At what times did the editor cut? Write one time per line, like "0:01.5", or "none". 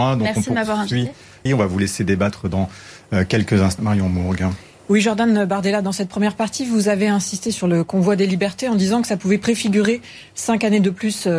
0:01.5
0:03.8